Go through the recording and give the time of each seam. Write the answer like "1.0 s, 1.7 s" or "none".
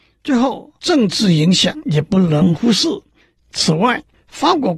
3.4 s

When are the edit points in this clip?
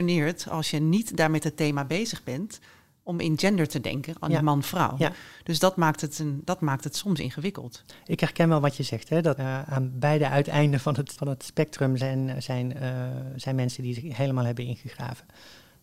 9.4 s, 11.1 s

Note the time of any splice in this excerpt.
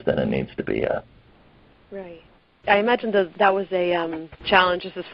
none

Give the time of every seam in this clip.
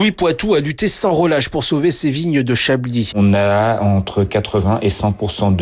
3.1 s

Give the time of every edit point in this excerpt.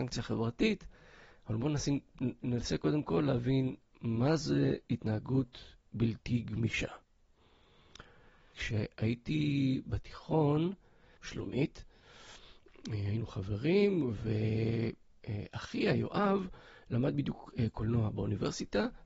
8.5 s, 11.2 s

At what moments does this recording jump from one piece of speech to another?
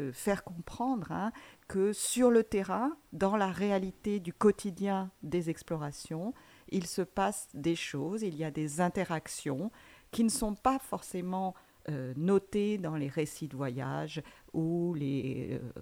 none

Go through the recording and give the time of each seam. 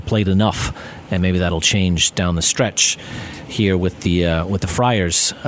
1.2 s

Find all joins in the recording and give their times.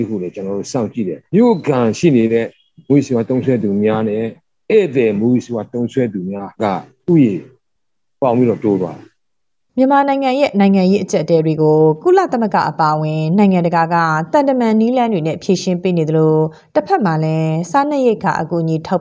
1.3 s, 6.5 s

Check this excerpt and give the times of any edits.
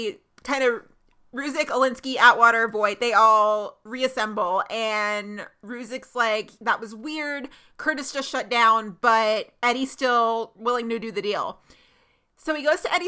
none

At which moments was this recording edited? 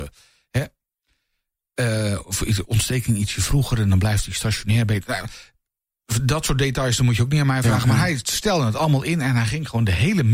none

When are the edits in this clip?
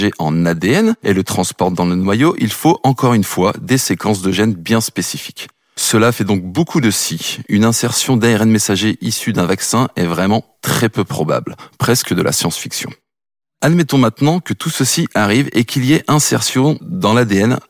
none

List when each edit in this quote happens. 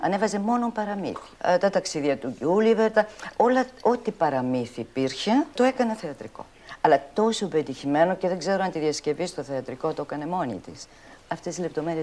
2.9 s

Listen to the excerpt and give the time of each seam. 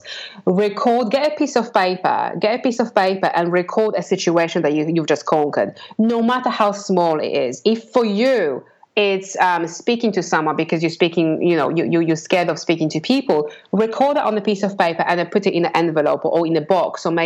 none

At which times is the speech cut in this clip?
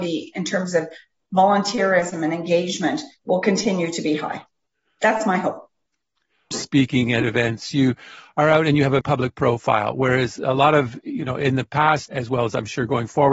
6.5 s, 9.0 s, 12.1 s

